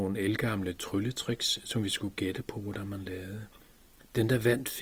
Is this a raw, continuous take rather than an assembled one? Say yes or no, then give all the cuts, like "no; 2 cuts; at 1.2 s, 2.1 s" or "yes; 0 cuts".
yes; 0 cuts